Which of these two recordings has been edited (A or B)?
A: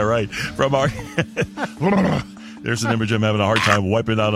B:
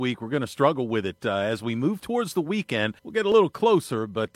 B